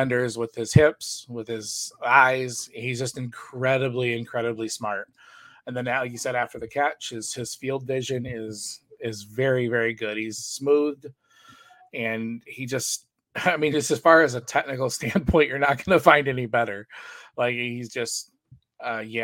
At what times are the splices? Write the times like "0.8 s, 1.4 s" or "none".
none